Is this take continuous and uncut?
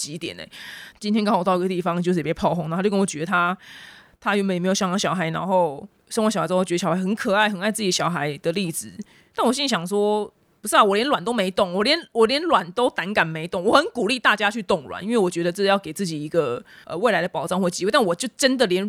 yes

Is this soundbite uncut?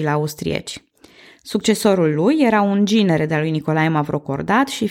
yes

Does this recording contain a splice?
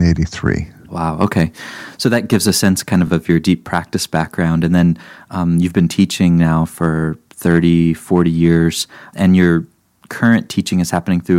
no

